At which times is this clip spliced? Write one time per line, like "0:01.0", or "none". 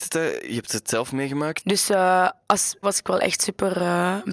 0:01.6
0:02.8